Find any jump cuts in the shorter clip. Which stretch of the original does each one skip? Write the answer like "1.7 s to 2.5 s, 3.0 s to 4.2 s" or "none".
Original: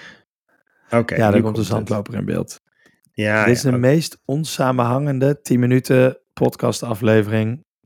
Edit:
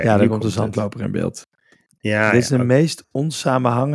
none